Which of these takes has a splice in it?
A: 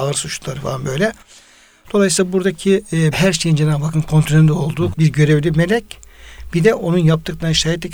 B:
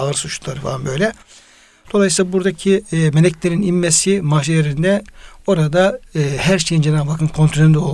A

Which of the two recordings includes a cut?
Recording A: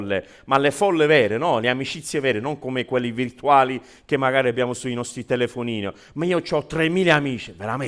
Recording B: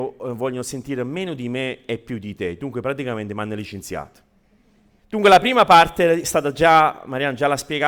B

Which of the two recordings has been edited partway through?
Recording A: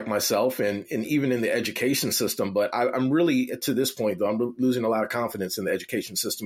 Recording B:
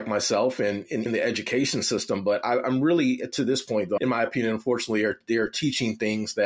B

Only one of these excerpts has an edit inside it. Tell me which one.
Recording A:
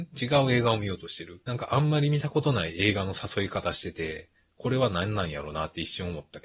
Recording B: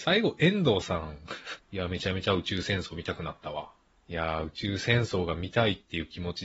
B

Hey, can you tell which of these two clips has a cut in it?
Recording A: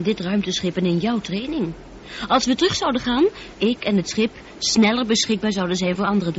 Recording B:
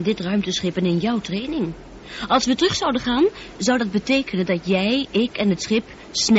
A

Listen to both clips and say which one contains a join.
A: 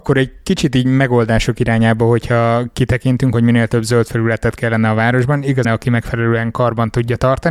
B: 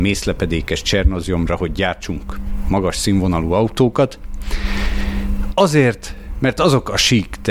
A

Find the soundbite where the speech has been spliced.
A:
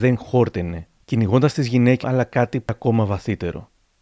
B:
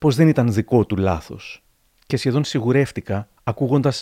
A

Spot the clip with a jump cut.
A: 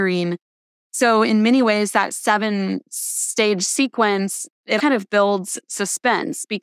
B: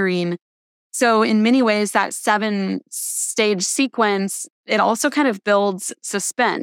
A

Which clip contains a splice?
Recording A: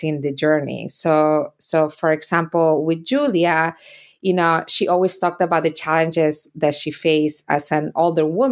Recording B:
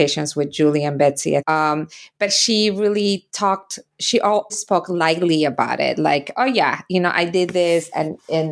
B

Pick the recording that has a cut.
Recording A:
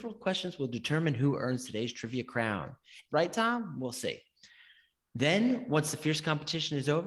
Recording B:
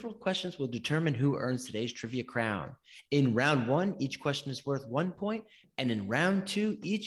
A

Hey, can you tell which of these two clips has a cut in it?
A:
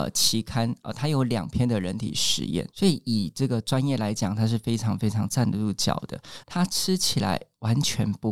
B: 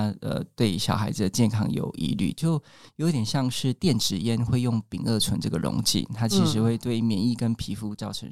A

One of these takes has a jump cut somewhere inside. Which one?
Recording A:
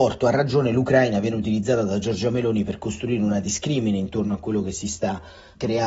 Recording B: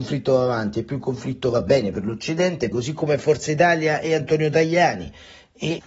B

